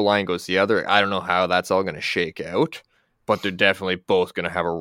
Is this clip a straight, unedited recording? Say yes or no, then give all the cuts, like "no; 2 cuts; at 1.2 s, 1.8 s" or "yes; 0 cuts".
yes; 0 cuts